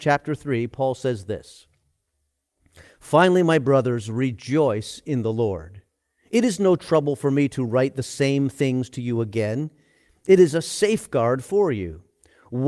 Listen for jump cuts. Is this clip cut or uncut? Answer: uncut